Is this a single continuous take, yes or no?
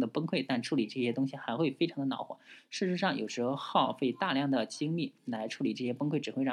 yes